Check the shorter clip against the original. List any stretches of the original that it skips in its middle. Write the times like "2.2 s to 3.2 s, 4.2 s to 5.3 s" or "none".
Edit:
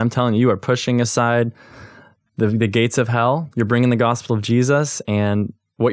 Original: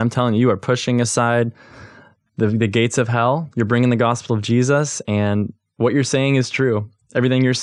none